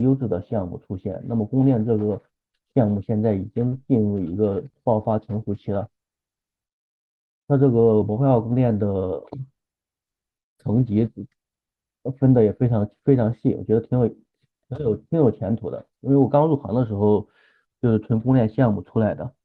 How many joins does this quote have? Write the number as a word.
zero